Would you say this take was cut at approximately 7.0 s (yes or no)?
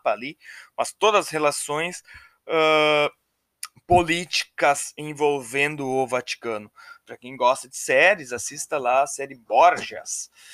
yes